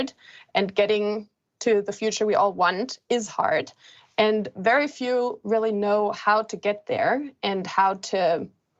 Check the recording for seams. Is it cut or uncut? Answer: uncut